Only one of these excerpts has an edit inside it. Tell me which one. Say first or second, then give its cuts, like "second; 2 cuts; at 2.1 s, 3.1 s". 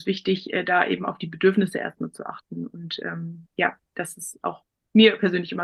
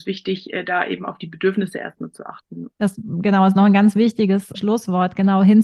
second; 2 cuts; at 2.7 s, 4.5 s